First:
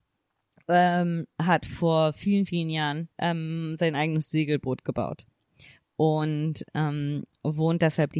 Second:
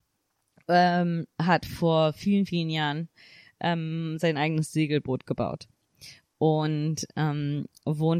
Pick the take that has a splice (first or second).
first